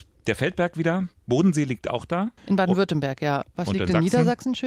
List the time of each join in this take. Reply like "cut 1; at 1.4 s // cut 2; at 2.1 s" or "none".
cut 1; at 2.4 s